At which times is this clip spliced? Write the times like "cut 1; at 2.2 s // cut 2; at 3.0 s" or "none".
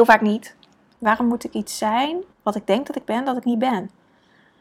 cut 1; at 1.0 s // cut 2; at 2.3 s